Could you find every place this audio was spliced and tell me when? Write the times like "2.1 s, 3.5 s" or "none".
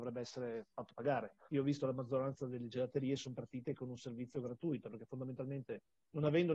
1.5 s